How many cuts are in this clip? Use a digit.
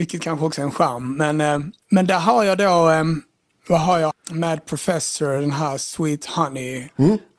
2